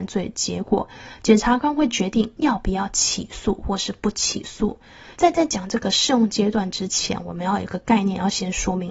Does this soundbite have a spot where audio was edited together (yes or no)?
yes